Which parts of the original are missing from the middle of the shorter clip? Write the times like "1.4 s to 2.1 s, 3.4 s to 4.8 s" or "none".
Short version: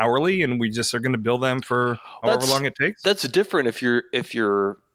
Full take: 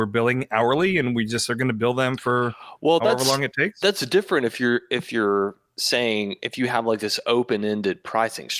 2.8 s to 3.0 s